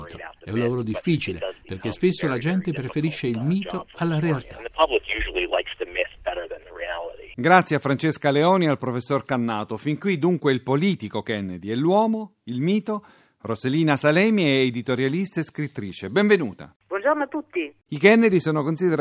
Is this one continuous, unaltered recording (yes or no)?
yes